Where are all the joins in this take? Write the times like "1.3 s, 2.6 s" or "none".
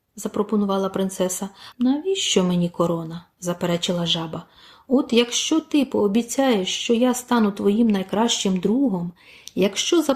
1.7 s